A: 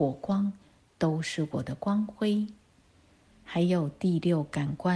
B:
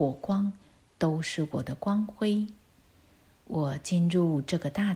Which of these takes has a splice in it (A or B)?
A